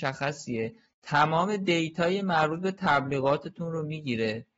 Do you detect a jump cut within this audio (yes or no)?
no